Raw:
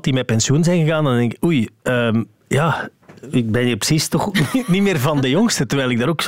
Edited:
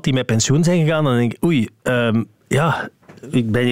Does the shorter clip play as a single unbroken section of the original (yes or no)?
yes